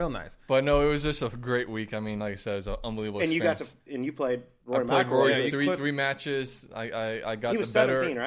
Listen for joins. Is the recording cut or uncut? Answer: uncut